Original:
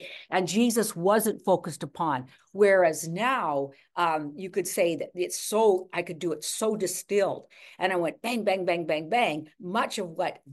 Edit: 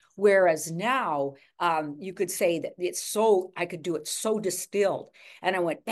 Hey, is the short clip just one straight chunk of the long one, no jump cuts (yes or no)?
yes